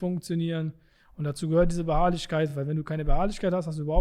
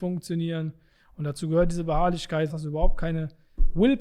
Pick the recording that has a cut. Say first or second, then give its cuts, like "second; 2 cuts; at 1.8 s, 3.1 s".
second; 1 cut; at 2.5 s